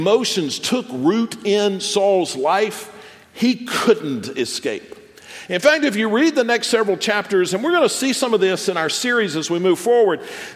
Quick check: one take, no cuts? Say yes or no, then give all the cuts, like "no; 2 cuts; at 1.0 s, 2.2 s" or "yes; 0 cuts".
yes; 0 cuts